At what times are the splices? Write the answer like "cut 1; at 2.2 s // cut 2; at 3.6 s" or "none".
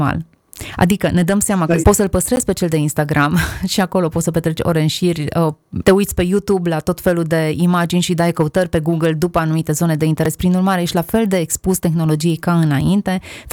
cut 1; at 1.8 s // cut 2; at 5.8 s